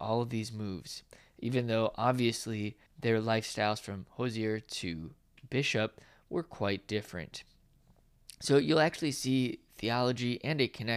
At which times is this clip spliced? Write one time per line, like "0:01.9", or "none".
0:02.9